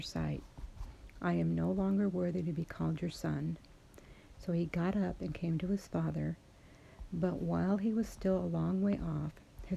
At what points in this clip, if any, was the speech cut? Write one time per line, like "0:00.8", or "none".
0:04.3